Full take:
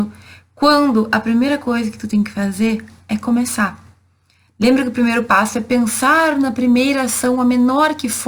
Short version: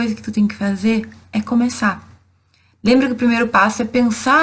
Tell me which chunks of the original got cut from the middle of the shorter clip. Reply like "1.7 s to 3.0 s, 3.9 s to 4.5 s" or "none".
none

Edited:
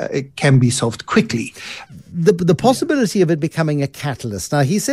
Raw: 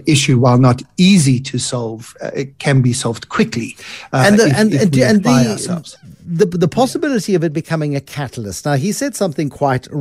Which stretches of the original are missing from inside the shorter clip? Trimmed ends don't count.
4.1 s to 6.0 s

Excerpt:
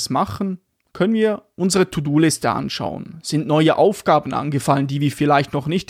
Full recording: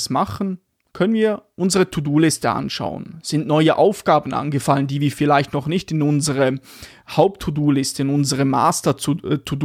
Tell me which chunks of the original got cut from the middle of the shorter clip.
none

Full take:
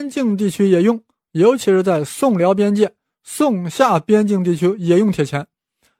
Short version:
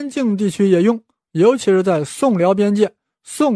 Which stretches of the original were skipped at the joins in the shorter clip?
none

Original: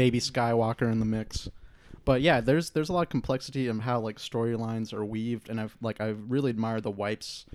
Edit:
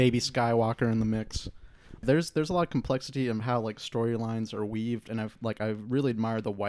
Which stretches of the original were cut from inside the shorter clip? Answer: 2.0 s to 2.4 s

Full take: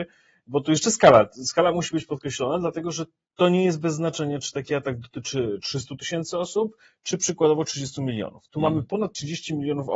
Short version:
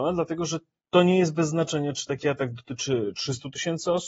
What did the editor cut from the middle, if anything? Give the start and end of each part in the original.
none

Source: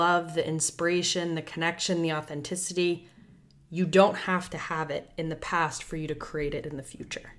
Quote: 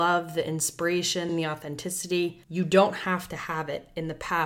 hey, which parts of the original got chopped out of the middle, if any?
1.3 s to 1.9 s, 3.1 s to 3.7 s

